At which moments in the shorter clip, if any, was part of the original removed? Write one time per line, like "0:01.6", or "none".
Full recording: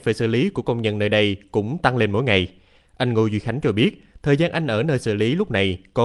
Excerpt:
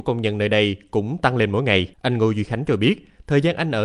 0:01.9